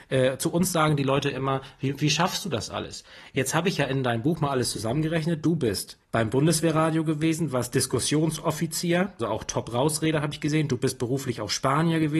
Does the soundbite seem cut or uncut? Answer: cut